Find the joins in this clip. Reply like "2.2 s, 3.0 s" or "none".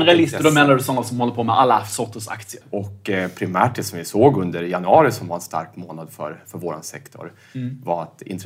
2.6 s